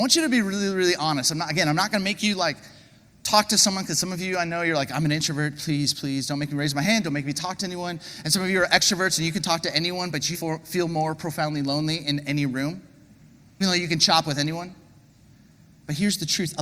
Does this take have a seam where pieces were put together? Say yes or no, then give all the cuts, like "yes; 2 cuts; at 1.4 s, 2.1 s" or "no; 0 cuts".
yes; 3 cuts; at 5.9 s, 10.3 s, 13.6 s